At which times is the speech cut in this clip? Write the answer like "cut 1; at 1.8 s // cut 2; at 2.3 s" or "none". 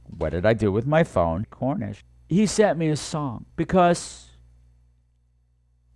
cut 1; at 1.4 s // cut 2; at 3.5 s